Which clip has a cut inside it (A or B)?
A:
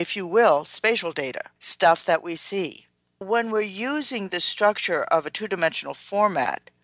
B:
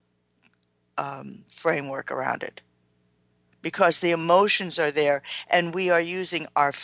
A